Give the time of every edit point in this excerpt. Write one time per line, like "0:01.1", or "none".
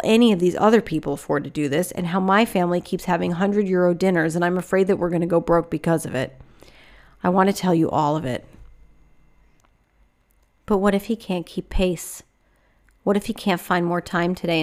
none